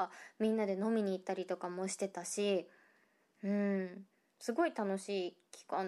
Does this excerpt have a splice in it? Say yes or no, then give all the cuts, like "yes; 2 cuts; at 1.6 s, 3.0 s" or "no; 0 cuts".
no; 0 cuts